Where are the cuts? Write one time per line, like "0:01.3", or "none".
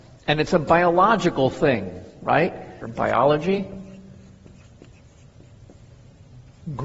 0:02.8